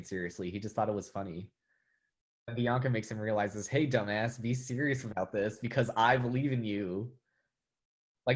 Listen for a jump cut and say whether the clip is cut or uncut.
uncut